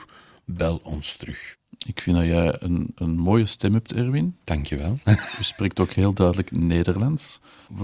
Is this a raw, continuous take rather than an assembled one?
yes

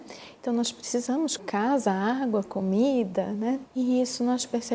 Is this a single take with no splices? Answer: no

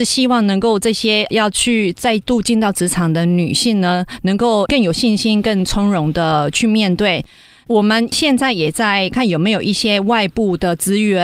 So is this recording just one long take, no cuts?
no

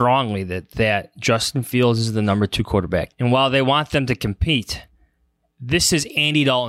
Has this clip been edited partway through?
yes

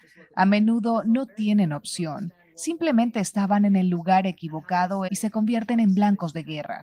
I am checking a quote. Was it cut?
yes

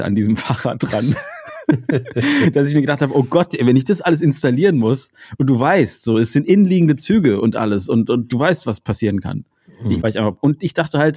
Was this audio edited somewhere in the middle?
yes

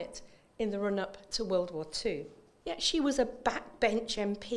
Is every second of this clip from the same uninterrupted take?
no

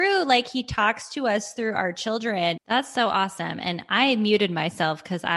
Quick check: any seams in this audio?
yes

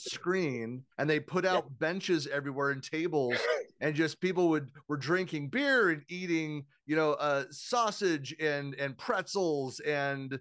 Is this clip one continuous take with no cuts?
no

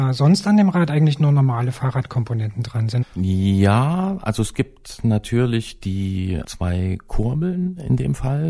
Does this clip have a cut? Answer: yes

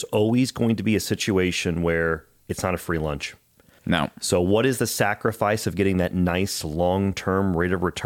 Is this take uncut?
no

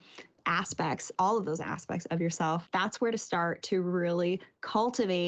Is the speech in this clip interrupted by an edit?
yes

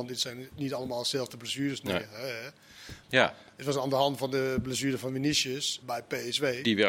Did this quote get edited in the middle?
yes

